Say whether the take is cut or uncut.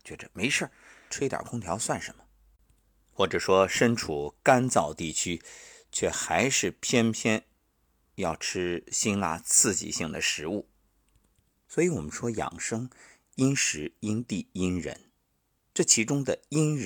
cut